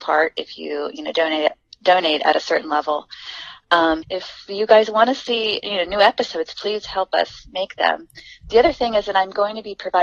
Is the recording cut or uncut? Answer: cut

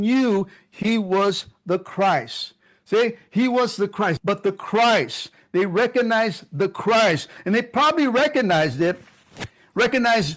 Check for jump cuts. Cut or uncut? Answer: cut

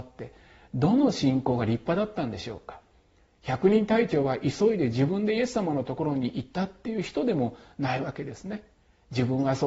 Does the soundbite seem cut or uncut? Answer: uncut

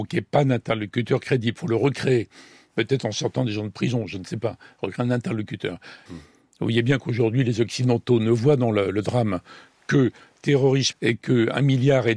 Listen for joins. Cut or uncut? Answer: cut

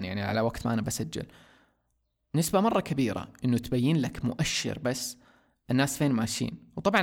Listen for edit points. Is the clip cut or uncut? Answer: uncut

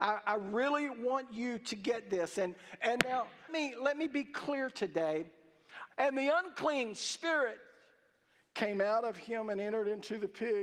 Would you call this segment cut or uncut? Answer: cut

